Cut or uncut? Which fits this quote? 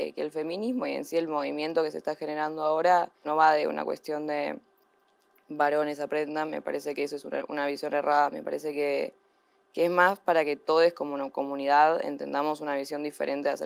uncut